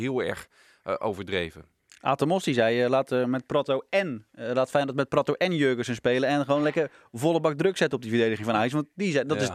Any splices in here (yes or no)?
no